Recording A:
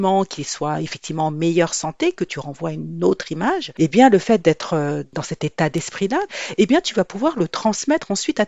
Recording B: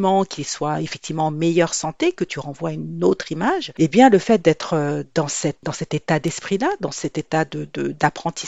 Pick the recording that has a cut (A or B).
A